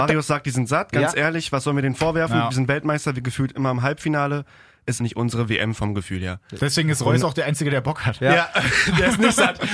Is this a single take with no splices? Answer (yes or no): no